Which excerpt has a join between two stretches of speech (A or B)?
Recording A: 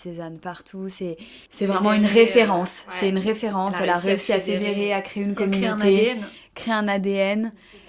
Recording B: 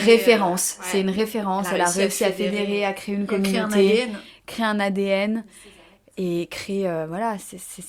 A